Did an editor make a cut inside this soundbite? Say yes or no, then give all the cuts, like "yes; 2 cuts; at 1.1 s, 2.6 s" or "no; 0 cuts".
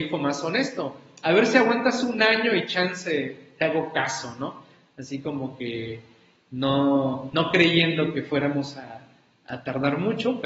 no; 0 cuts